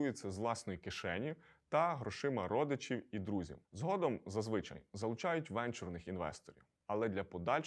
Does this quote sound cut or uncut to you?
cut